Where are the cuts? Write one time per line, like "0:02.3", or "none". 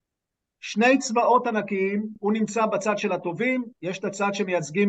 none